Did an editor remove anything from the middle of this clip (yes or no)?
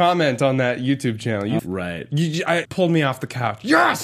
yes